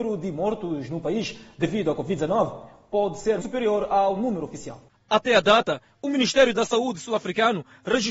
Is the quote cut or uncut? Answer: cut